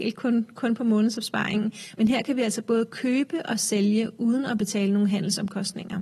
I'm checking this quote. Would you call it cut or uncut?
uncut